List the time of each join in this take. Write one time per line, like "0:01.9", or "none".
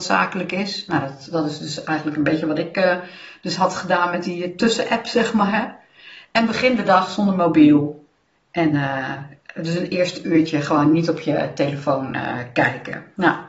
none